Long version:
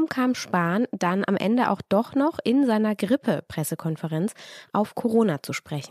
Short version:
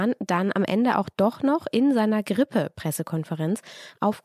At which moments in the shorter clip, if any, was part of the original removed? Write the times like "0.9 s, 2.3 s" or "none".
none